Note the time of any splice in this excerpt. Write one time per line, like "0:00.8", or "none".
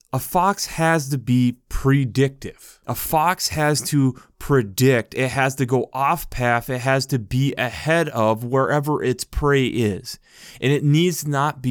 none